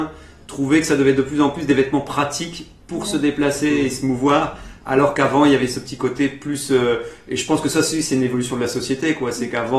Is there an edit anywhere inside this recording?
no; 0 cuts

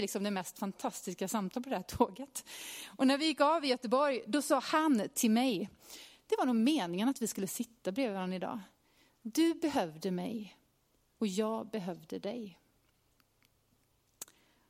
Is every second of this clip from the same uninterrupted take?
yes; 0 cuts

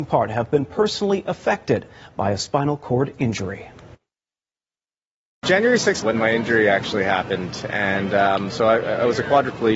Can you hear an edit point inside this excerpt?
yes; 1 cut; at 6.0 s

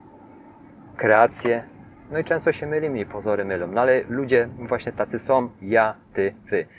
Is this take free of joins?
yes; 0 cuts

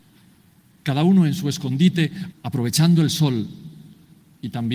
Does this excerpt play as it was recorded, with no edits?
no; 1 cut; at 2.3 s

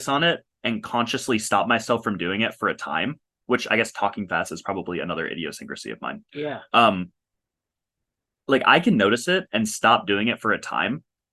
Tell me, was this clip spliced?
no; 0 cuts

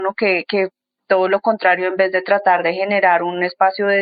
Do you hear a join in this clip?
no; 0 cuts

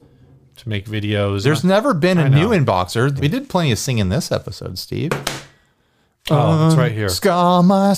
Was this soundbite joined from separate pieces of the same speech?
yes; 2 cuts; at 1.4 s, 3.2 s

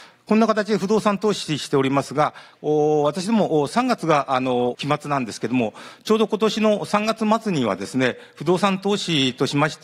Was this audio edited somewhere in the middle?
yes; 1 cut; at 2.5 s

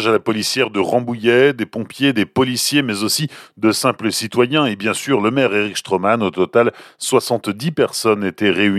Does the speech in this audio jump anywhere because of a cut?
no; 0 cuts

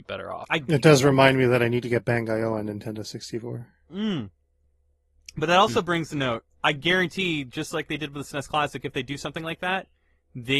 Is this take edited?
no; 0 cuts

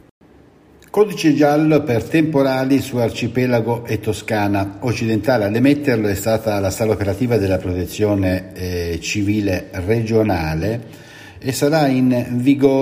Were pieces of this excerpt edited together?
no; 0 cuts

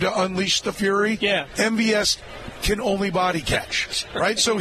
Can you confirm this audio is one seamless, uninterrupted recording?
yes; 0 cuts

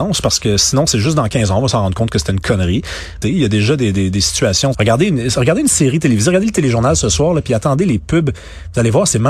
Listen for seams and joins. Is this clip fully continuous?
no; 2 cuts; at 3.2 s, 4.7 s

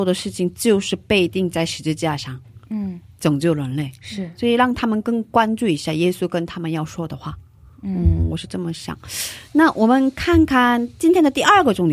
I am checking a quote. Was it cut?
no; 0 cuts

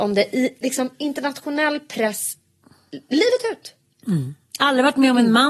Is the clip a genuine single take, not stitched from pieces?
yes; 0 cuts

